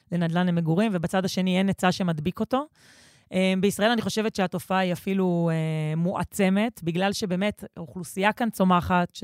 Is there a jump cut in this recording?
no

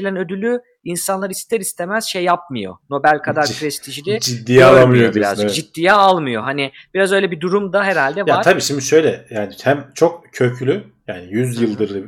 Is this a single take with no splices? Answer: yes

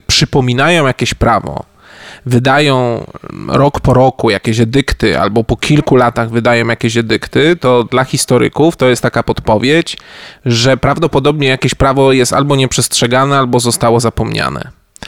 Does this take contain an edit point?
no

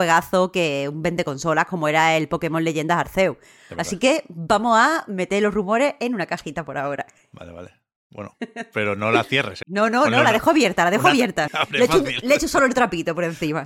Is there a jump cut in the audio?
yes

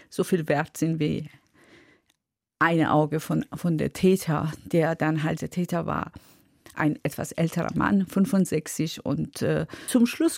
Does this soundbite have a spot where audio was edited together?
yes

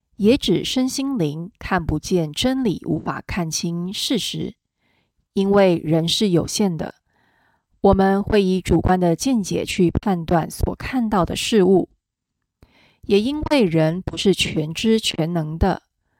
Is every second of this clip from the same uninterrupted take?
yes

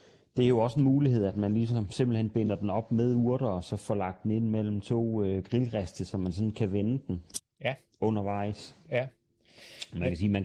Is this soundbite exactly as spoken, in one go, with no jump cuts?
yes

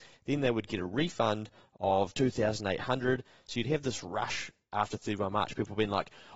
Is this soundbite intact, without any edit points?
yes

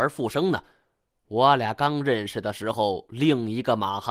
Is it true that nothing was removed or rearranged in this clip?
yes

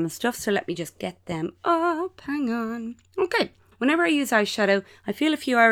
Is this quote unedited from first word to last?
no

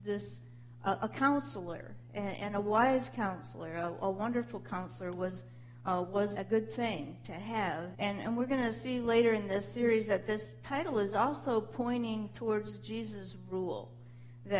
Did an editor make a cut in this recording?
yes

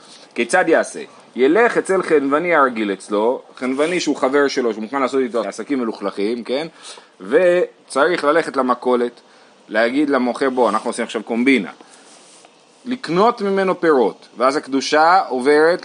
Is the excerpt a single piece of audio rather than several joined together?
no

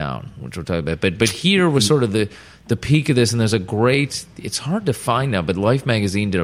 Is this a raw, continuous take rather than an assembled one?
yes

